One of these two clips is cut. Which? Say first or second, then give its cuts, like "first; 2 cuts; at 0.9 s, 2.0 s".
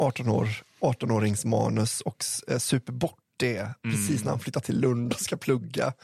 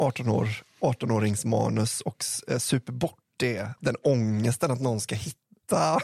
second; 1 cut; at 3.8 s